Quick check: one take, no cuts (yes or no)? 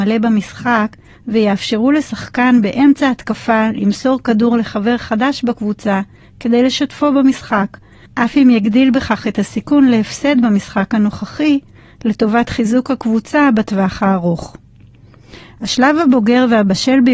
no